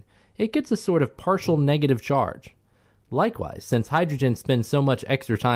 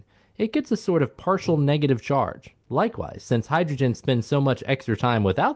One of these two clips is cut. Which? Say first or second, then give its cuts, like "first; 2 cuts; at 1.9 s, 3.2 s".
second; 1 cut; at 2.6 s